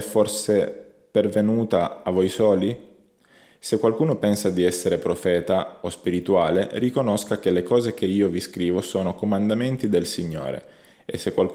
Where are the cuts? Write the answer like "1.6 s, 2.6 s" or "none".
none